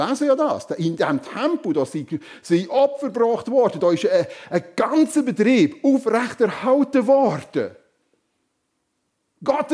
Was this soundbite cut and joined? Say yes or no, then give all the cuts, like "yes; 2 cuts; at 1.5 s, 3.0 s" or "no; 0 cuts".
no; 0 cuts